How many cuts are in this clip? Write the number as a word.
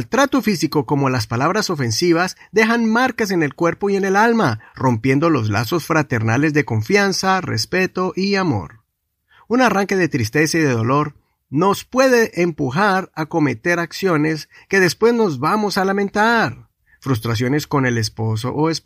zero